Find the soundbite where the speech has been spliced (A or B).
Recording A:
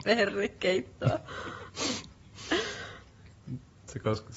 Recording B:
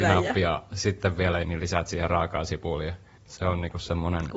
B